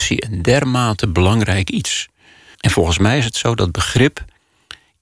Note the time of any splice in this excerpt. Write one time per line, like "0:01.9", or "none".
0:02.5